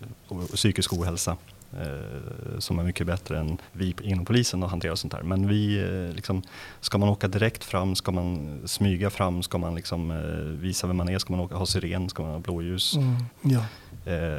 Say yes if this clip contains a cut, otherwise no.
yes